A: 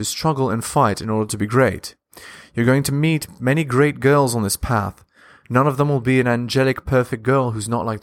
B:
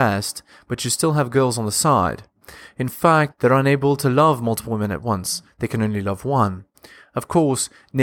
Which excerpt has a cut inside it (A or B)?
B